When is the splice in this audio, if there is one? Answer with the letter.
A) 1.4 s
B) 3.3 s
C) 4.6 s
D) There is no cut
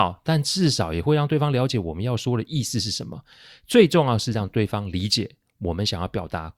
D